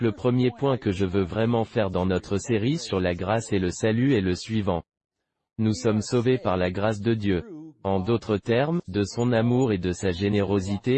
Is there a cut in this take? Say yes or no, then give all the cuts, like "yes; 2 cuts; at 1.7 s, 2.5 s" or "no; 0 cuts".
yes; 1 cut; at 8.8 s